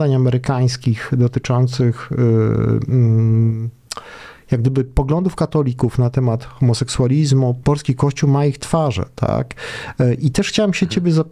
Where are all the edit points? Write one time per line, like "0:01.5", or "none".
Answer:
0:07.6